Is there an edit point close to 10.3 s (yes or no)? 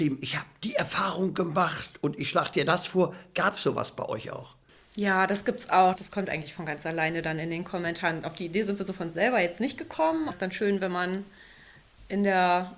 yes